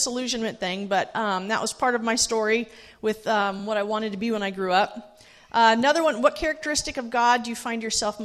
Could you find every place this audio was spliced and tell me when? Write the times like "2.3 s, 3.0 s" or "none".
none